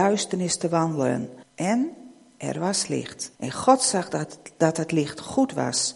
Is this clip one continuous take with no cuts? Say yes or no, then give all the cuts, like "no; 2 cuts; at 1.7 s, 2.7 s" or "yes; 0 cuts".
no; 2 cuts; at 1.4 s, 3.3 s